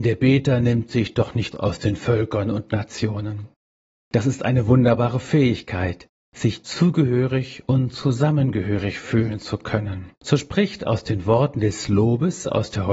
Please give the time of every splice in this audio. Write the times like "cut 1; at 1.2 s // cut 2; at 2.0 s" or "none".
cut 1; at 1.5 s // cut 2; at 3.9 s // cut 3; at 10.2 s